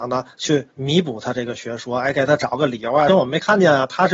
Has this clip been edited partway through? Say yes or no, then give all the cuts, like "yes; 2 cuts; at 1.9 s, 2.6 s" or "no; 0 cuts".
yes; 1 cut; at 3.1 s